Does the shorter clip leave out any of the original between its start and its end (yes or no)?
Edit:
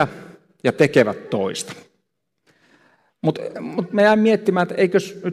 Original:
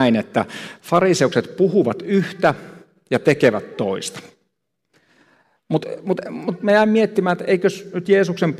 yes